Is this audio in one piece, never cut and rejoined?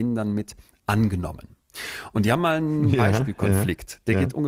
yes; 0 cuts

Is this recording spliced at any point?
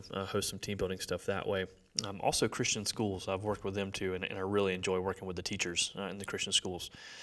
no; 0 cuts

